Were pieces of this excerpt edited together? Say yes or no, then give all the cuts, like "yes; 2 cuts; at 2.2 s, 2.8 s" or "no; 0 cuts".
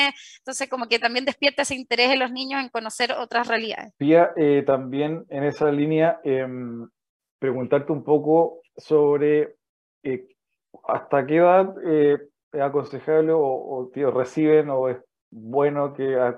yes; 1 cut; at 3.9 s